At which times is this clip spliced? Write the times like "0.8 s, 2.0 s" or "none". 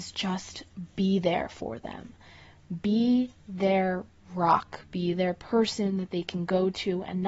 none